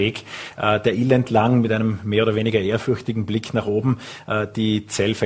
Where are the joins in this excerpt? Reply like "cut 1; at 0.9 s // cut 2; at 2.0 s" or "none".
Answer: none